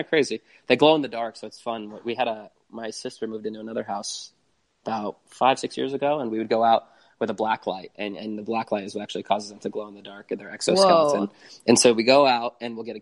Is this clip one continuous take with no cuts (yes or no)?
yes